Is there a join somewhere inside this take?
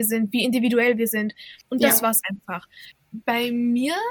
yes; 2 cuts; at 1.6 s, 2.9 s

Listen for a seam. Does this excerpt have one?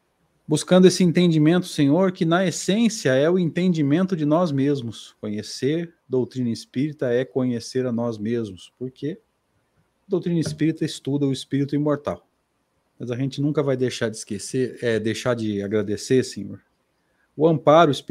yes; 1 cut; at 12.9 s

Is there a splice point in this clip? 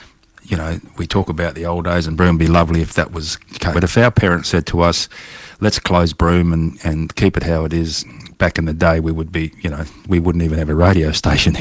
yes; 1 cut; at 3.7 s

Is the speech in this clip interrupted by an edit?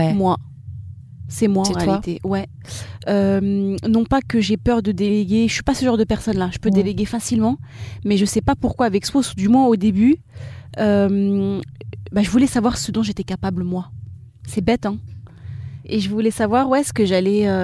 no; 0 cuts

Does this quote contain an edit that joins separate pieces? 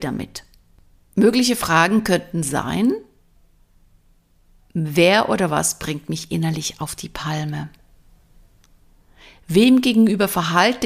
no; 0 cuts

